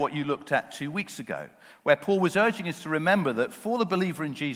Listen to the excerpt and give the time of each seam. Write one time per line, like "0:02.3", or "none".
none